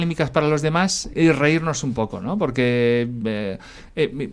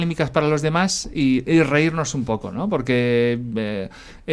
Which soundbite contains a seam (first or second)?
first